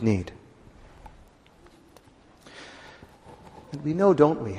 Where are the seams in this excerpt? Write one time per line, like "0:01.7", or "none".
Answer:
0:03.6